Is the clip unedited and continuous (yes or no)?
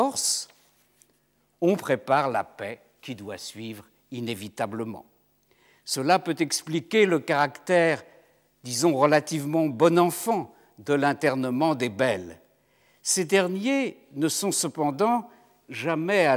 yes